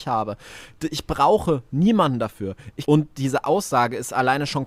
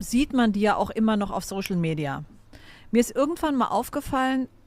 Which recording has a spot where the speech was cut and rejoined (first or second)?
first